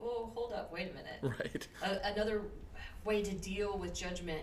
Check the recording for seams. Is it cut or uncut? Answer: cut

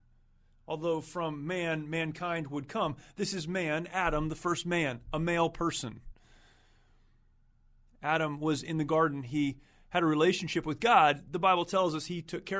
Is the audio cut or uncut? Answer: uncut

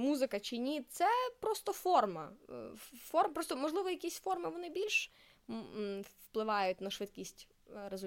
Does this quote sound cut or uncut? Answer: uncut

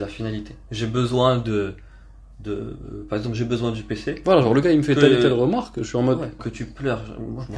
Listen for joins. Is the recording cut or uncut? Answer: cut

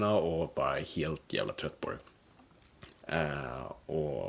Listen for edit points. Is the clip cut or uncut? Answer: cut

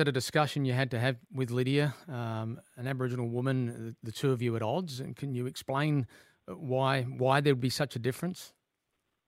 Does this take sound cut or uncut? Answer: uncut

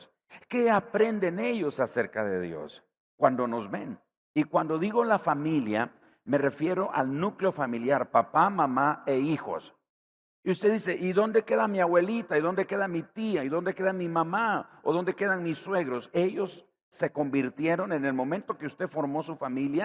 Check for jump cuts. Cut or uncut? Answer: uncut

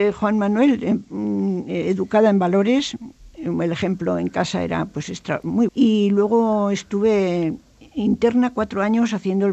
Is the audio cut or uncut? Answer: cut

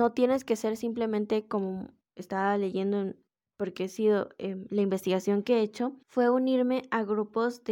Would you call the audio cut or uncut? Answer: cut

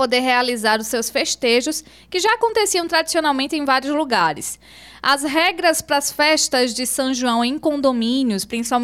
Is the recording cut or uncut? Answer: uncut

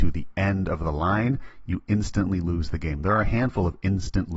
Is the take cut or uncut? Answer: uncut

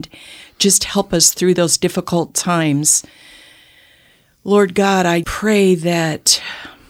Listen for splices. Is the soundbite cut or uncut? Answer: cut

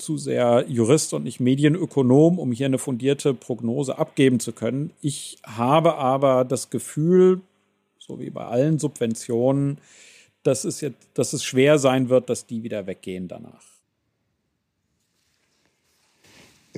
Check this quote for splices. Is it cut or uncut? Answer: uncut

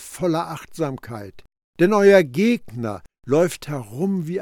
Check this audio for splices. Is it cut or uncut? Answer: cut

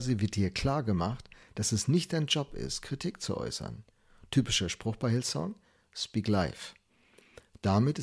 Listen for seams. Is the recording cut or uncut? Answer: uncut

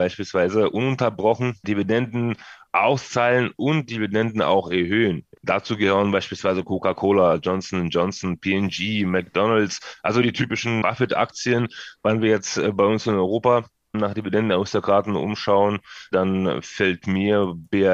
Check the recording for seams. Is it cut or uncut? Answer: uncut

